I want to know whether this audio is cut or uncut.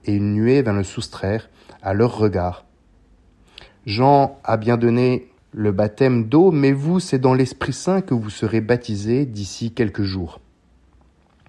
cut